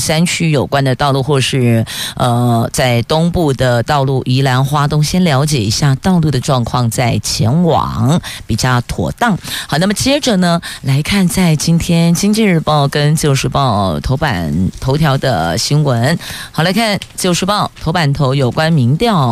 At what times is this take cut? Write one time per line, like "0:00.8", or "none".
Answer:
none